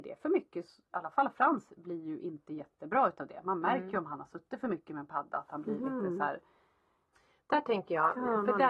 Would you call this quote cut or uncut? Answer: uncut